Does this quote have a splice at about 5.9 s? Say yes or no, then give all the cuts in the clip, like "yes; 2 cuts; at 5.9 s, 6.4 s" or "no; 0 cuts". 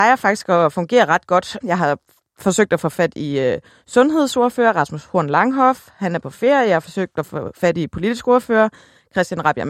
no; 1 cut; at 1.6 s